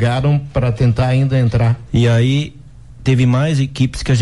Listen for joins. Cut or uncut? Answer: cut